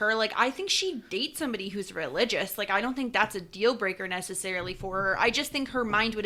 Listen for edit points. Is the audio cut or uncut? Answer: uncut